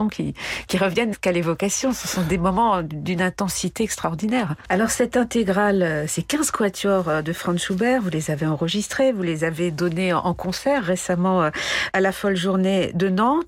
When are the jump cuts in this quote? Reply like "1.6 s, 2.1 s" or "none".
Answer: 1.1 s, 4.6 s

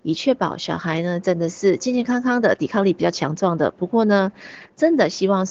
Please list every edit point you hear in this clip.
none

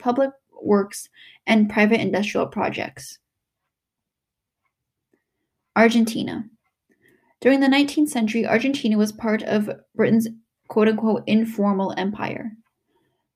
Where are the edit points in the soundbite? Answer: none

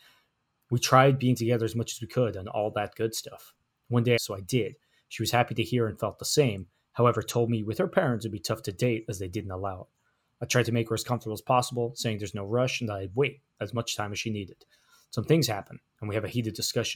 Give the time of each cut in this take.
4.2 s

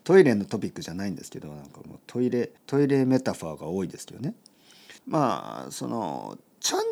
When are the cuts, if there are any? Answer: 2.6 s, 5.0 s

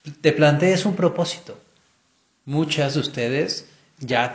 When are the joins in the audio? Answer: none

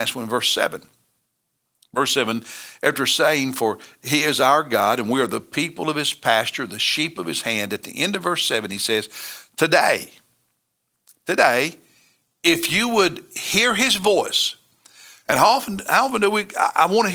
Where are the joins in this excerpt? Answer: none

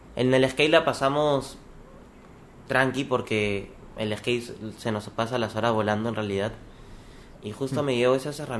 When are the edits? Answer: 7.3 s

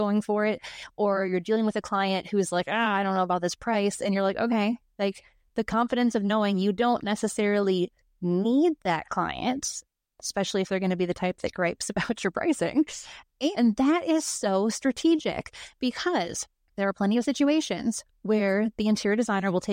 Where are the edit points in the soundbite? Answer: 13.5 s

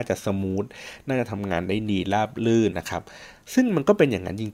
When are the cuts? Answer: 2.7 s

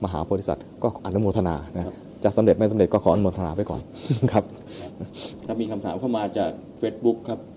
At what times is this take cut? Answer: 1.0 s

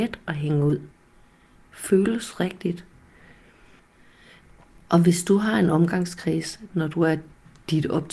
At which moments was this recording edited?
1.6 s, 6.7 s

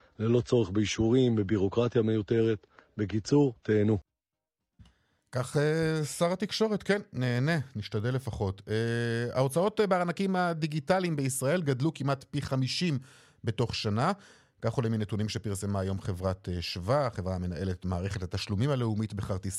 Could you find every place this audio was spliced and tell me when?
none

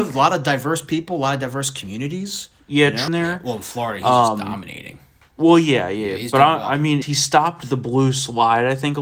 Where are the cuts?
3.1 s, 7.0 s

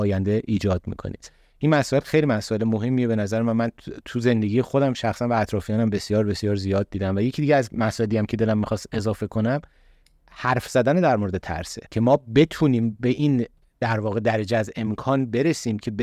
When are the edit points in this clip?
11.9 s

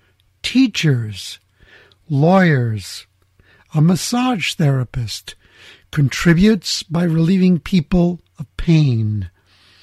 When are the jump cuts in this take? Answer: none

